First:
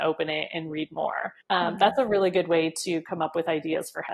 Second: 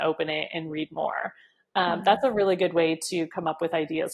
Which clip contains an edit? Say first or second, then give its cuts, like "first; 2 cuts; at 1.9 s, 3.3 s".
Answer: first; 1 cut; at 1.4 s